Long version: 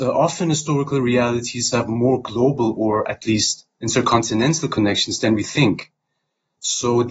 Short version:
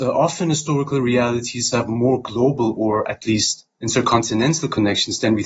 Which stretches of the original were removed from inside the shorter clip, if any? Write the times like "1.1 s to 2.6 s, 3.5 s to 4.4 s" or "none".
none